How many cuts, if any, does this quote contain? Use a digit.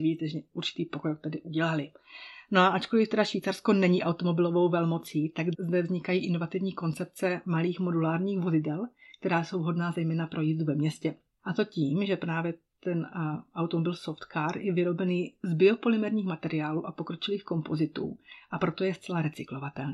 2